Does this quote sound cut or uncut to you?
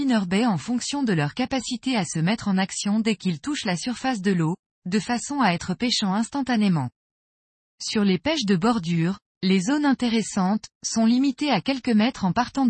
cut